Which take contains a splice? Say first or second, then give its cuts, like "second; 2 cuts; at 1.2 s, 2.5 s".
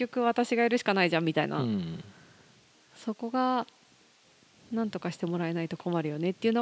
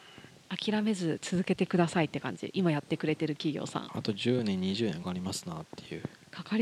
second; 1 cut; at 5.0 s